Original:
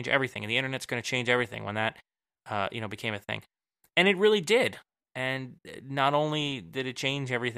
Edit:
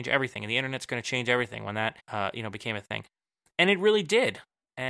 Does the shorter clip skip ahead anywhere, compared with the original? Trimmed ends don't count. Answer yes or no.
yes